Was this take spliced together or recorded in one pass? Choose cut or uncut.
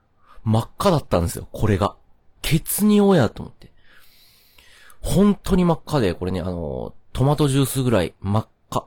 cut